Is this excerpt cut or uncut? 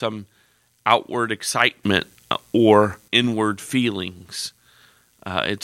cut